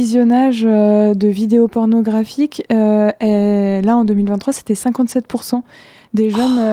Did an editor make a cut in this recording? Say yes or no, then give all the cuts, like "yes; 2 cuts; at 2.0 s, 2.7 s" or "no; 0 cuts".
no; 0 cuts